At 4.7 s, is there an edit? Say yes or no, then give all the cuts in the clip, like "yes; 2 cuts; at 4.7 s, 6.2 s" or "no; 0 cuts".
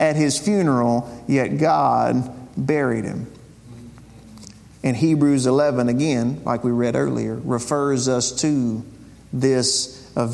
yes; 1 cut; at 4.7 s